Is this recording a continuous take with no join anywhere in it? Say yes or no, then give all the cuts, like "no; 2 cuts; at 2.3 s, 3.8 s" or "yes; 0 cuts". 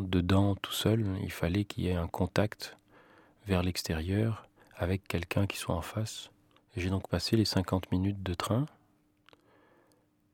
no; 1 cut; at 6.6 s